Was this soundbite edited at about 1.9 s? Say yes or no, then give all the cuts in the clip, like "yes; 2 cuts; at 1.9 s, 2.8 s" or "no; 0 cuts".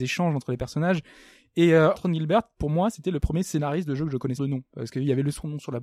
yes; 2 cuts; at 1.9 s, 4.4 s